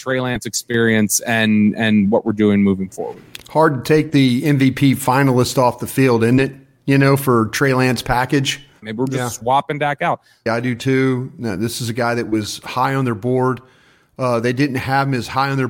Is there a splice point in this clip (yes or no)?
yes